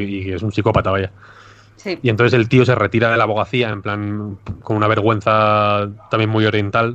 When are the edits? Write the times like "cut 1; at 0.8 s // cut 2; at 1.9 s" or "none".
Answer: none